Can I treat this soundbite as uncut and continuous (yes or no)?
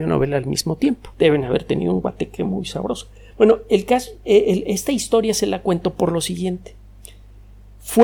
no